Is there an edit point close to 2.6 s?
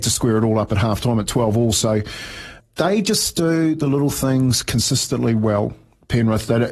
yes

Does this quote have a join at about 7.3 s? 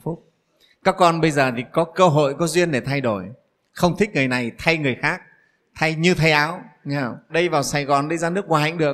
yes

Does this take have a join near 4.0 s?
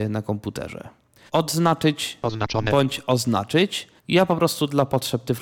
yes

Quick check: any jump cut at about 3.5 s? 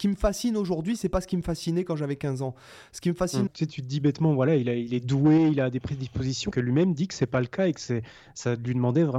yes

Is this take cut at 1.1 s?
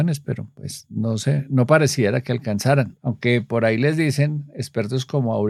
no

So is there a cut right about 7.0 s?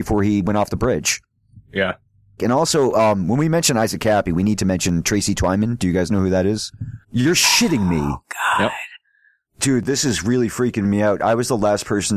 yes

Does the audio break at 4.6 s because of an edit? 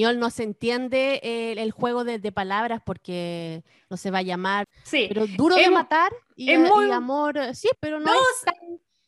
yes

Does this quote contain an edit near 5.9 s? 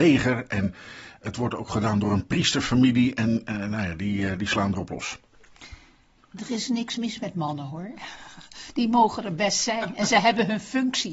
no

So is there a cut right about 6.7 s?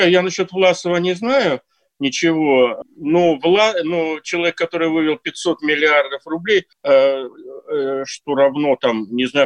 yes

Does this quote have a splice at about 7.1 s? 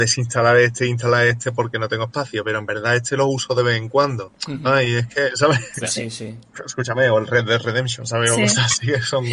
no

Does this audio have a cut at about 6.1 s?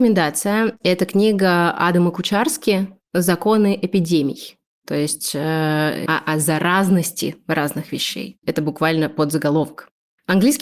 yes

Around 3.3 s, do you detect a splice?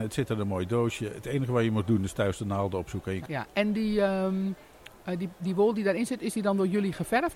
yes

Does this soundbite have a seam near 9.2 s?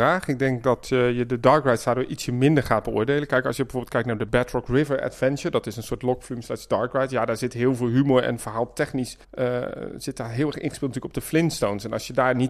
yes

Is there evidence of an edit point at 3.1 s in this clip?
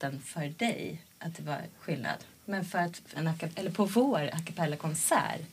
yes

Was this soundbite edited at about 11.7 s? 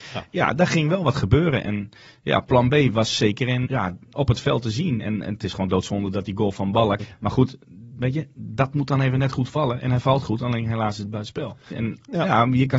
yes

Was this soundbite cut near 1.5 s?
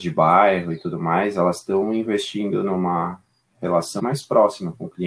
no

